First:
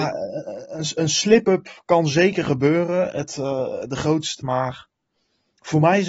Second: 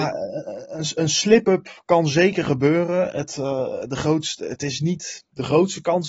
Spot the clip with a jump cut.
first; 1 cut; at 4.4 s

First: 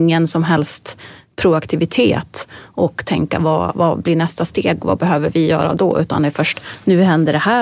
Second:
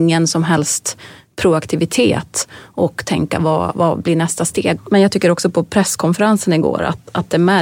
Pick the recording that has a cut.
second; 1 cut; at 4.8 s

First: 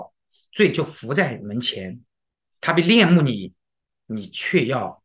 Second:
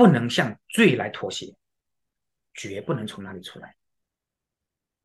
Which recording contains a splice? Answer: second; 1 cut; at 2.4 s

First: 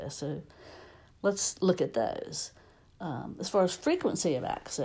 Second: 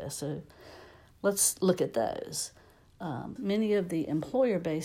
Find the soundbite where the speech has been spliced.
second; 1 cut; at 3.4 s

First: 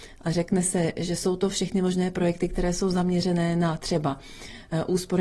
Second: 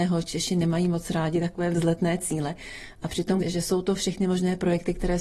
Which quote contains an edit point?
second; 1 cut; at 3.4 s

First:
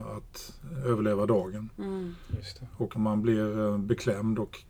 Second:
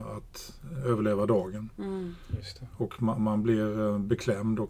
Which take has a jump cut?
first; 1 cut; at 2.9 s

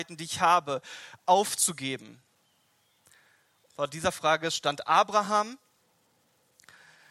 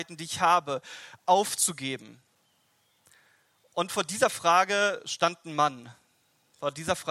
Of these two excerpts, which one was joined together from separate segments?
first; 1 cut; at 3.7 s

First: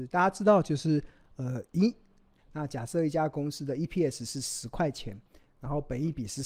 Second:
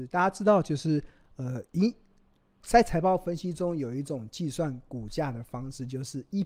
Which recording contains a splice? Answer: first; 1 cut; at 2.4 s

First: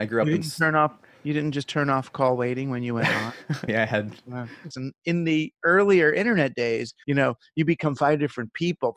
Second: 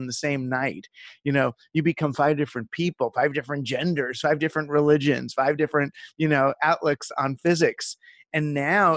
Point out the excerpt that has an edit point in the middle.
first; 3 cuts; at 3.7 s, 4.7 s, 7.0 s

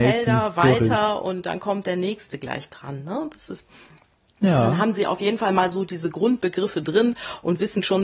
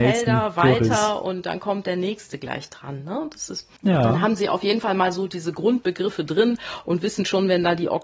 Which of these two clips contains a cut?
second; 1 cut; at 3.8 s

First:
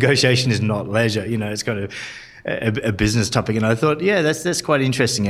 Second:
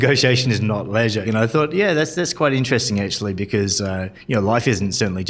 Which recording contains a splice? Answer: second; 1 cut; at 1.2 s

